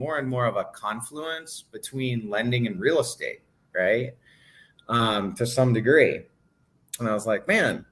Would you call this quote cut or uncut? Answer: cut